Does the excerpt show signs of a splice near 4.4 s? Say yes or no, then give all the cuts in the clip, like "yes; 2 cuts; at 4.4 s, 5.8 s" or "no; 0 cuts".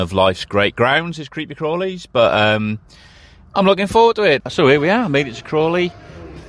yes; 1 cut; at 4.4 s